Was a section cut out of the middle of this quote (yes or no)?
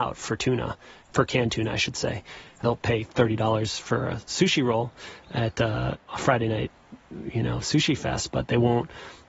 no